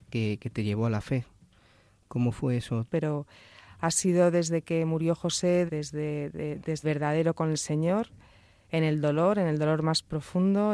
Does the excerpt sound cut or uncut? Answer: cut